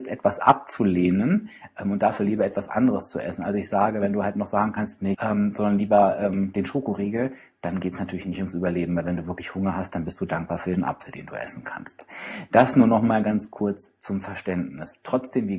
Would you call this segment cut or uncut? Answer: cut